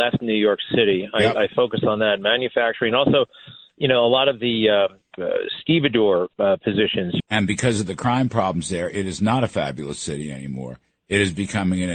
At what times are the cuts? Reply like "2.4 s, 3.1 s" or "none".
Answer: 5.2 s, 7.2 s